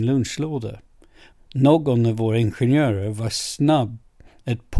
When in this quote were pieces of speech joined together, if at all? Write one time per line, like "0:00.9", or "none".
0:01.3